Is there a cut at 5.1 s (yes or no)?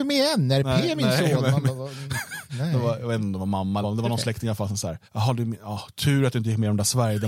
yes